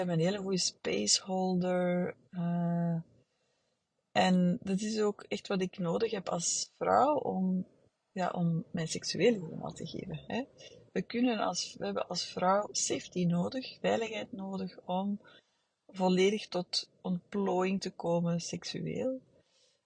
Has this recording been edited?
no; 0 cuts

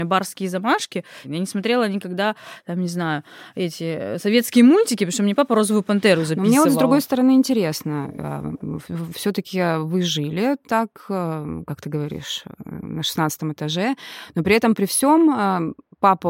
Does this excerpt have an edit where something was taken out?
yes; 1 cut; at 1.2 s

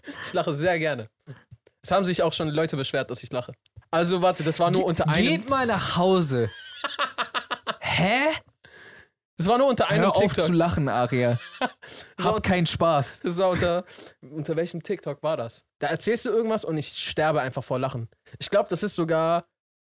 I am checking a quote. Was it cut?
no; 0 cuts

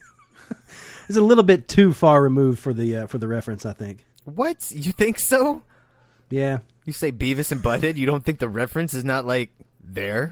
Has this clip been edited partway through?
no; 0 cuts

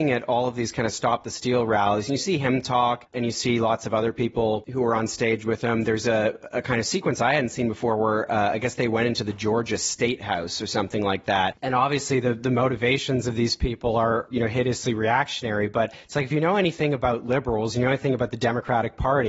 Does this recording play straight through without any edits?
no; 1 cut; at 11.5 s

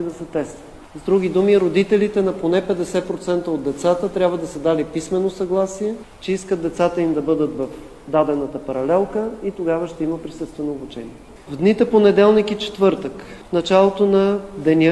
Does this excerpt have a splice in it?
yes; 1 cut; at 11.5 s

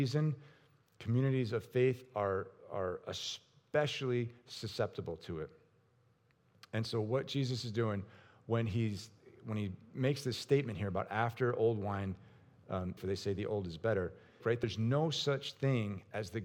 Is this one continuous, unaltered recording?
no; 2 cuts; at 13.0 s, 14.4 s

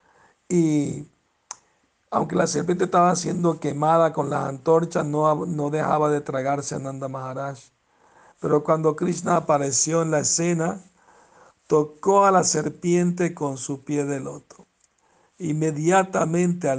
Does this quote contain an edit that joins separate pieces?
no; 0 cuts

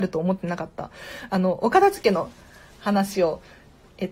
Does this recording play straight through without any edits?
yes; 0 cuts

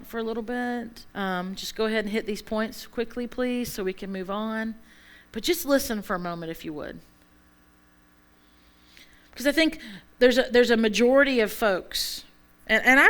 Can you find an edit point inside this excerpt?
yes; 1 cut; at 1.1 s

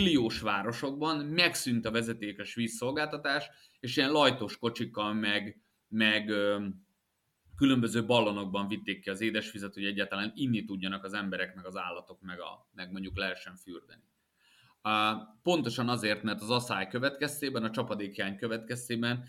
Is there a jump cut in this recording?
no; 0 cuts

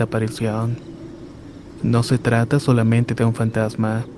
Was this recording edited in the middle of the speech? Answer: yes; 1 cut; at 1.8 s

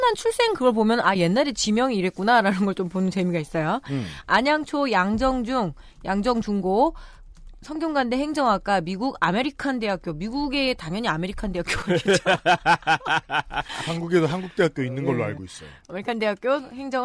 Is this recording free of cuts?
yes; 0 cuts

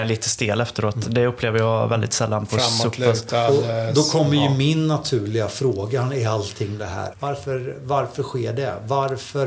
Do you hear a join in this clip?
yes; 1 cut; at 7.1 s

